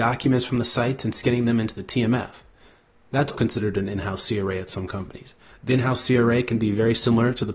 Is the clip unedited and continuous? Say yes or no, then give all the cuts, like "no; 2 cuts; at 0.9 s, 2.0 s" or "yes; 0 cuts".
no; 2 cuts; at 3.3 s, 5.5 s